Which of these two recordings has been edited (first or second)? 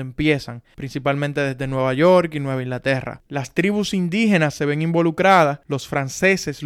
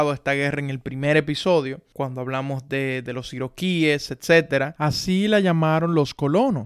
second